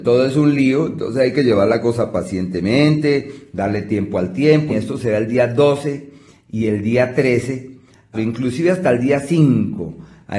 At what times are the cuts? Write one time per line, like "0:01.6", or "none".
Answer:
0:04.7
0:08.1